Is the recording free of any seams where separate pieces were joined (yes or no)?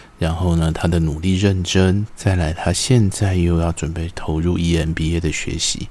no